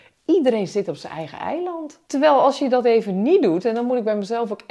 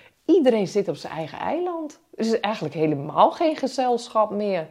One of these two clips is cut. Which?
first; 1 cut; at 2.1 s

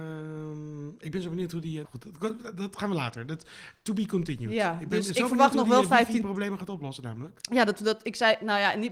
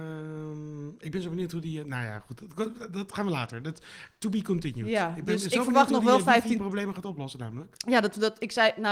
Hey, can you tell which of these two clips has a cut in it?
first; 1 cut; at 1.8 s

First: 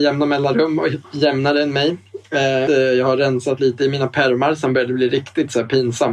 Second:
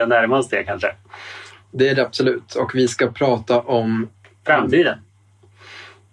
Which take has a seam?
first; 1 cut; at 2.7 s

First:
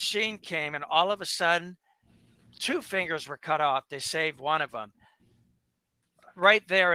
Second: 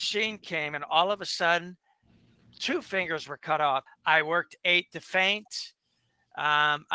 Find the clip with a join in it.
second; 1 cut; at 3.9 s

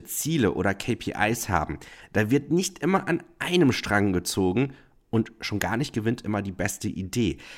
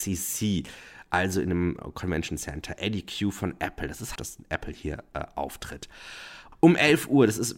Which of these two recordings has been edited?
second; 2 cuts; at 4.2 s, 6.5 s

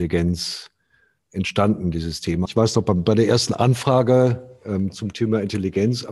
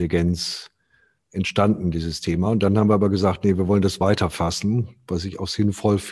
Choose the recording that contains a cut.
first; 1 cut; at 2.5 s

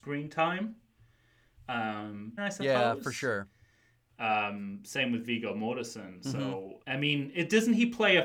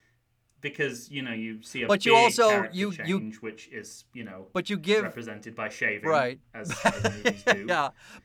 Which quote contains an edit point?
first; 3 cuts; at 2.4 s, 4.1 s, 6.8 s

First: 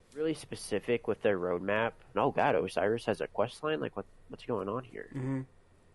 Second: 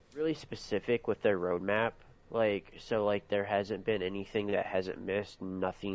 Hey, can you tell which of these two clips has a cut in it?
first; 1 cut; at 2.1 s

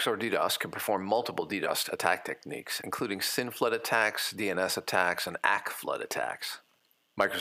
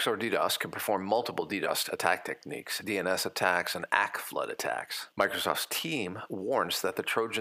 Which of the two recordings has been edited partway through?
second; 2 cuts; at 2.8 s, 5.1 s

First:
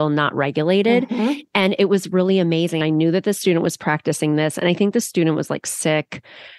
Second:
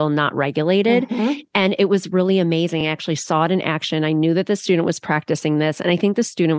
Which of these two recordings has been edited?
first; 1 cut; at 2.8 s

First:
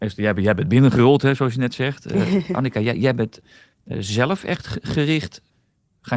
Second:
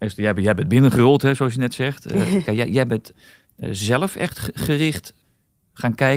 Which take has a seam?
second; 1 cut; at 2.4 s

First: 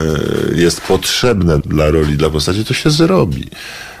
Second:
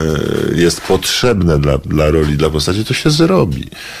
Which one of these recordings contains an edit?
first; 1 cut; at 1.6 s

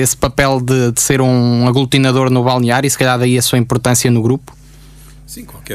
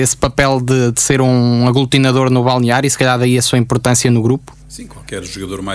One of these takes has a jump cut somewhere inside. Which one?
second; 1 cut; at 4.6 s

